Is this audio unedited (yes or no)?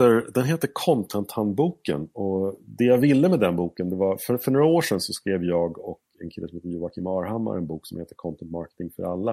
yes